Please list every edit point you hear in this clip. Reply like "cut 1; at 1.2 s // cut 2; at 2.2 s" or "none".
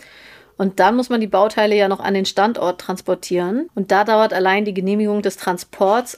cut 1; at 3.7 s